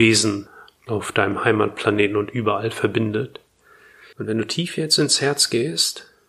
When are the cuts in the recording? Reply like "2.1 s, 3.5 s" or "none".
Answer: 4.1 s